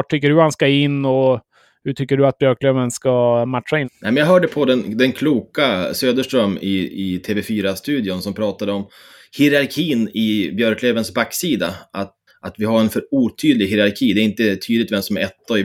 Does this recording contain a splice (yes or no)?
yes